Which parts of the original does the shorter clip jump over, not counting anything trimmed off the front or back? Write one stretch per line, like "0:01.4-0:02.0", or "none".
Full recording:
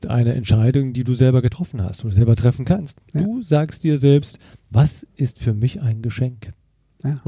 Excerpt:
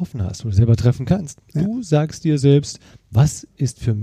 none